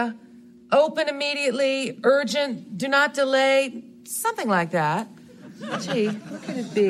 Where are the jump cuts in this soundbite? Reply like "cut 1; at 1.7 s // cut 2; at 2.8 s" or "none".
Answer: none